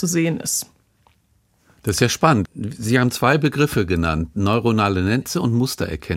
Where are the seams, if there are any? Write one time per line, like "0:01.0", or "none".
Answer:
0:02.5